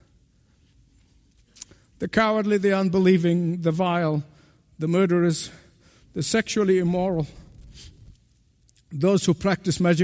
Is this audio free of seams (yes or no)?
yes